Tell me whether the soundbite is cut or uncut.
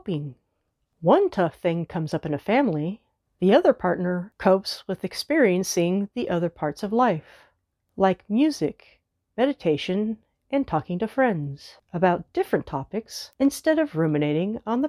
cut